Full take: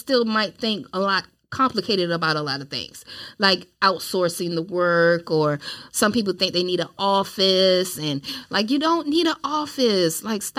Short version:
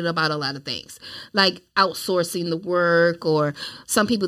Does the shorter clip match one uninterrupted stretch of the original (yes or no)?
yes